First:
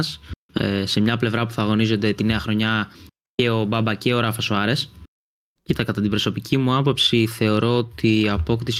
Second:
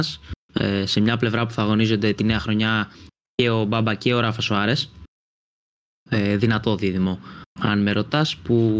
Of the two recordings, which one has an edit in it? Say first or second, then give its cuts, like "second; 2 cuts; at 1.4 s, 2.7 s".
first; 1 cut; at 5.6 s